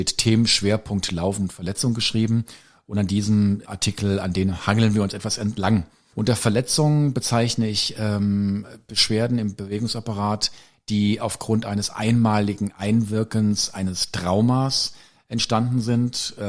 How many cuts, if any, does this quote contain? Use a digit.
2